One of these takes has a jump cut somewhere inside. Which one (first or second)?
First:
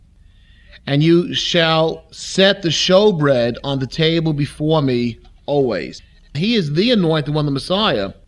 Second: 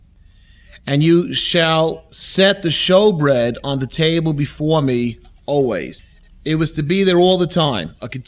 first